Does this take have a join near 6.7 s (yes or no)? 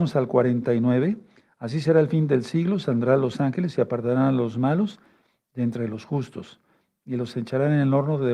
no